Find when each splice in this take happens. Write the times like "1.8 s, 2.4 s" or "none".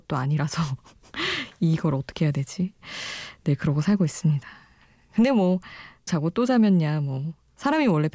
6.1 s